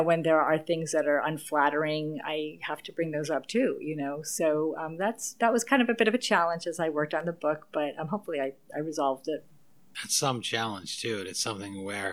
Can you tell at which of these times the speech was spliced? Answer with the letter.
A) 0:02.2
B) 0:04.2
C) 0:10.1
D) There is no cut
D